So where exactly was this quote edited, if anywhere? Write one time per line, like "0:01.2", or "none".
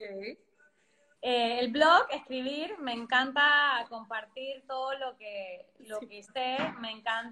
0:01.1